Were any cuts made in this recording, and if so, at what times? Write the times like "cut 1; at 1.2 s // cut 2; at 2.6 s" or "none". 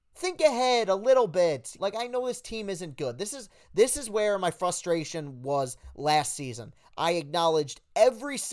cut 1; at 1.8 s